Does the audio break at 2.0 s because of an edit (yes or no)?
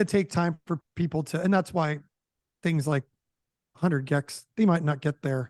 no